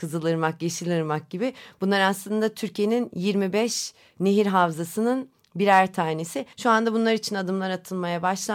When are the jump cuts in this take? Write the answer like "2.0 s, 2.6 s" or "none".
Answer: 6.5 s